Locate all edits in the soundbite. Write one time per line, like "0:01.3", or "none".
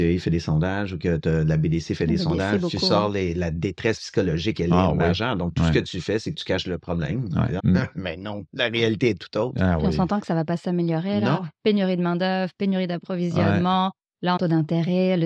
0:07.6
0:14.4